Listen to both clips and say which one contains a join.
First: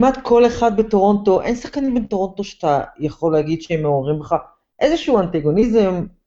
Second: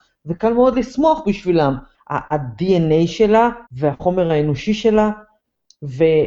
second; 2 cuts; at 1.9 s, 3.7 s

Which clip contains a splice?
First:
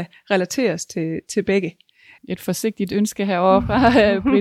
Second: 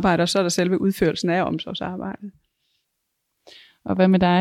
first; 1 cut; at 2.2 s

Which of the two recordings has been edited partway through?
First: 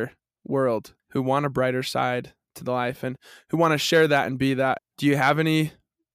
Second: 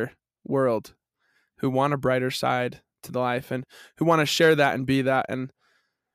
first; 2 cuts; at 1.0 s, 4.8 s

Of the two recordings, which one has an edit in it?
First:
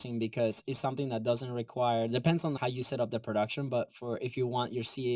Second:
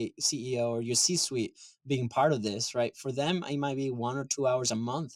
first; 1 cut; at 2.6 s

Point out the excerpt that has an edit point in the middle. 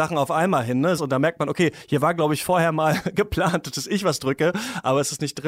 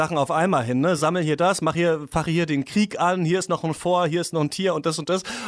first; 1 cut; at 1.0 s

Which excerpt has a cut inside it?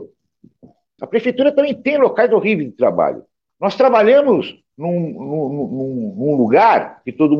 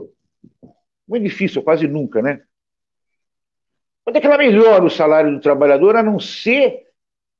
first; 2 cuts; at 1.0 s, 3.5 s

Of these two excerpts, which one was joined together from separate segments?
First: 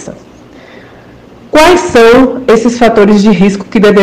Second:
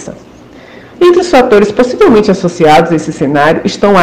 second; 1 cut; at 0.9 s

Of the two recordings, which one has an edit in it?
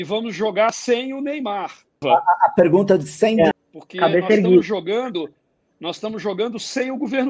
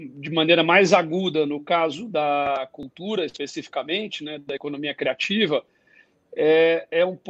first; 2 cuts; at 2.0 s, 3.5 s

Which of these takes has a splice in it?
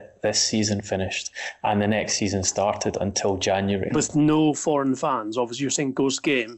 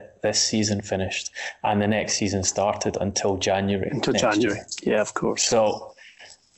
first; 1 cut; at 3.9 s

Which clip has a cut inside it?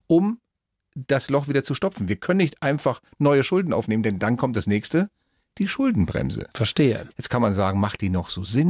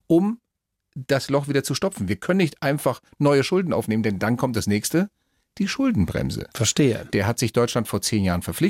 first; 1 cut; at 7.1 s

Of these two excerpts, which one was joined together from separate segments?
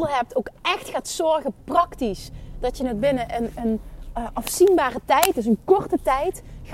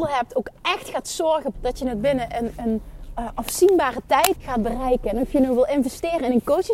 second; 2 cuts; at 1.5 s, 4.3 s

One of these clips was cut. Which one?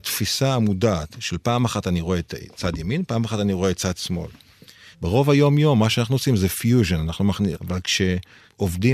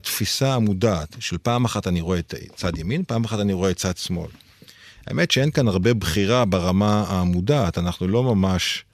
first; 2 cuts; at 4.9 s, 7.5 s

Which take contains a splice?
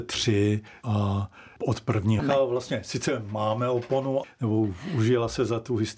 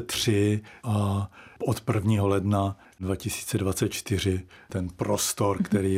first; 2 cuts; at 2.2 s, 4.2 s

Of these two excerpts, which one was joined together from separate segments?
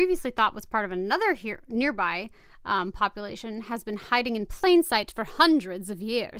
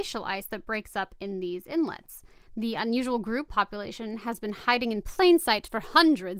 second; 2 cuts; at 2.5 s, 3.5 s

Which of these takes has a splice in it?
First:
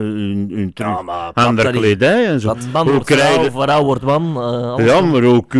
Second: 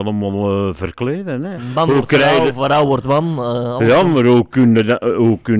second; 1 cut; at 1.6 s

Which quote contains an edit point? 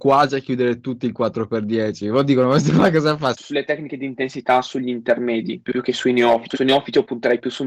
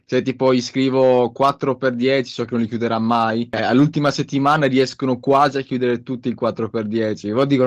first; 2 cuts; at 3.3 s, 6.5 s

